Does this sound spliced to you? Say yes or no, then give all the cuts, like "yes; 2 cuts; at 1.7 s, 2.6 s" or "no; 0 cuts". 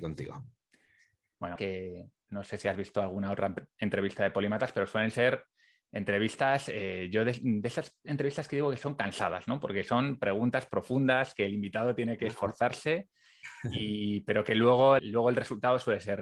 yes; 2 cuts; at 1.6 s, 15.0 s